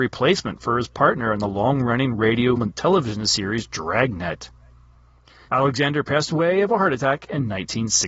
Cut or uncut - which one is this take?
cut